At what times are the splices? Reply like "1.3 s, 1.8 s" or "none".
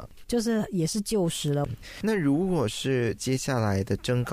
1.7 s